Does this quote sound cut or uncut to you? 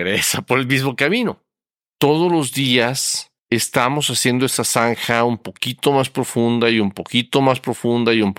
cut